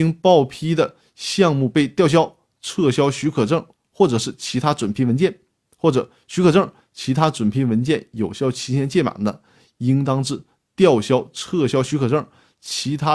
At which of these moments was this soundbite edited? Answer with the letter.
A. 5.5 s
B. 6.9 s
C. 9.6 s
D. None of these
D